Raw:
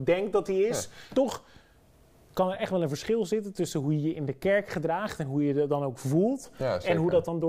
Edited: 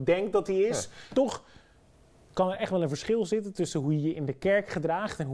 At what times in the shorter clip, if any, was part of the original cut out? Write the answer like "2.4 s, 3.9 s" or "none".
none